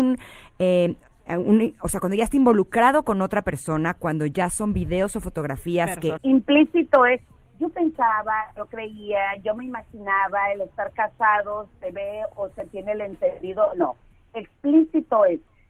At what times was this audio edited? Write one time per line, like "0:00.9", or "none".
0:06.2